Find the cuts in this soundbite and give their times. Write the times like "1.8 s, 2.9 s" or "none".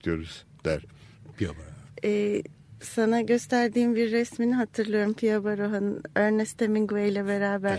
1.3 s